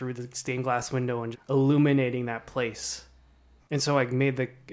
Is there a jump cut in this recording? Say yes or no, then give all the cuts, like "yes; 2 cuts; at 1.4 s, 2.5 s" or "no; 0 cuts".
yes; 2 cuts; at 1.3 s, 3.6 s